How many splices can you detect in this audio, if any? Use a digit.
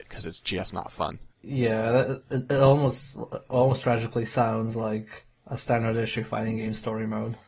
1